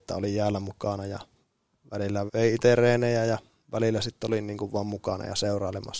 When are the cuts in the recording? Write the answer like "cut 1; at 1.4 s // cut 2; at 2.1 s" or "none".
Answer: cut 1; at 2.3 s